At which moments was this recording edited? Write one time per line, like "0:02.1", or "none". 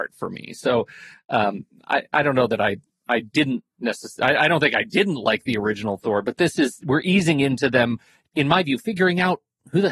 0:08.3